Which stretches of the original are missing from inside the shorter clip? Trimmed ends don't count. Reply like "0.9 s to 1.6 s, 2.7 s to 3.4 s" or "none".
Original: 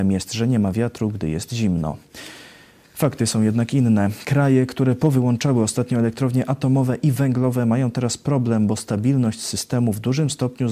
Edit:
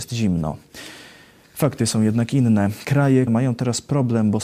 4.7 s to 7.6 s